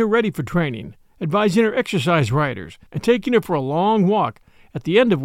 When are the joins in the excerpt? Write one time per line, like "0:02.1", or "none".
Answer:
0:02.9